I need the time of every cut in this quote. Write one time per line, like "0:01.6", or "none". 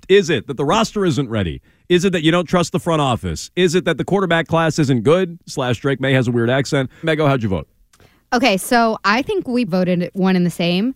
0:07.0
0:09.7